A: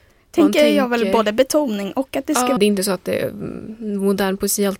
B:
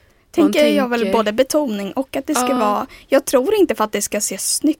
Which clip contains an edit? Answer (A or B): A